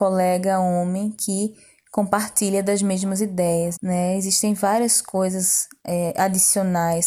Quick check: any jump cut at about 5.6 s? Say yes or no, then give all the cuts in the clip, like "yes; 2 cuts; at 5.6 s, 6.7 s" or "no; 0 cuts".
no; 1 cut; at 3.8 s